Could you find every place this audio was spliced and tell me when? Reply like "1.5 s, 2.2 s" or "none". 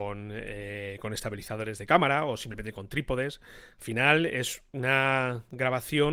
none